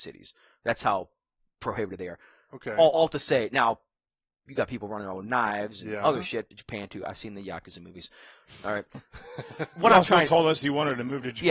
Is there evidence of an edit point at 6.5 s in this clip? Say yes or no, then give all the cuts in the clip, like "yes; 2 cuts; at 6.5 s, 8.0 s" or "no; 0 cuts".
yes; 1 cut; at 6.5 s